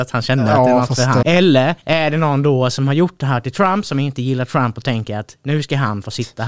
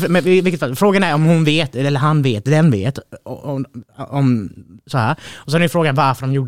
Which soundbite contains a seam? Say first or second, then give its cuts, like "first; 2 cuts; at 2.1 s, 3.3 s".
first; 1 cut; at 1.2 s